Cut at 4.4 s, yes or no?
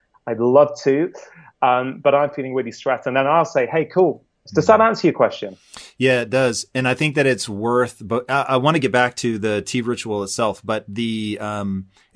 yes